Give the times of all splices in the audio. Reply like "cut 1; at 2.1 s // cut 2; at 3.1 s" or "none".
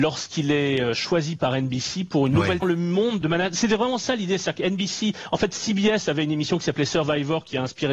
cut 1; at 2.6 s